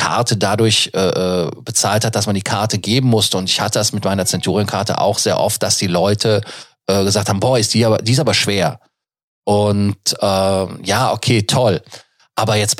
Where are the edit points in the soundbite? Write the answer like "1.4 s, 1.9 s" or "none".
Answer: none